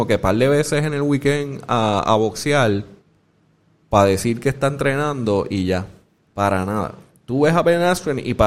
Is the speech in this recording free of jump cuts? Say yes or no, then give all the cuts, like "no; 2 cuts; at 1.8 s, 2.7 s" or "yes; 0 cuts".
no; 1 cut; at 6.2 s